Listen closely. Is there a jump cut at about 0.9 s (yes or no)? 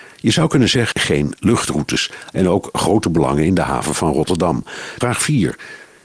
yes